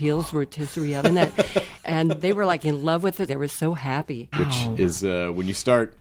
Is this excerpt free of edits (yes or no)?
no